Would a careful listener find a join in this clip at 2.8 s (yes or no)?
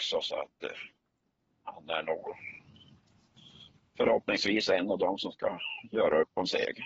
no